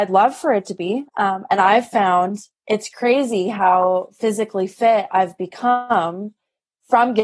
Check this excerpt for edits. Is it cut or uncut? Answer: cut